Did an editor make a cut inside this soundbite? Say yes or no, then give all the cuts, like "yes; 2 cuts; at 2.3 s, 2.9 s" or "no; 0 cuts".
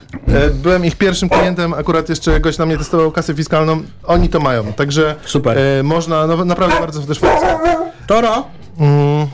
no; 0 cuts